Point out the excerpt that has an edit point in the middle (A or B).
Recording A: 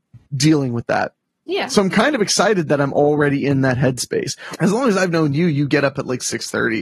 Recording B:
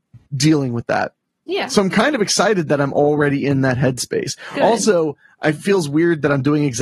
A